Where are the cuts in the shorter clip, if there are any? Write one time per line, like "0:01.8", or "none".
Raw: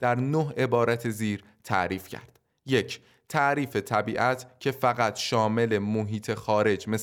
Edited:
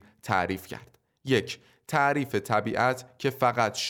none